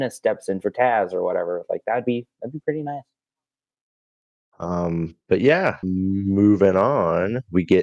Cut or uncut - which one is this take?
cut